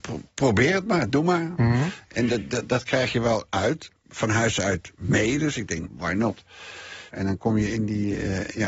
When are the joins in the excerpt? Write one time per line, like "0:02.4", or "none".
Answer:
0:05.9
0:07.1